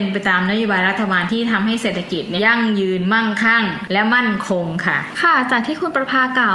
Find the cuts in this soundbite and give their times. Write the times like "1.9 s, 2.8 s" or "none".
2.4 s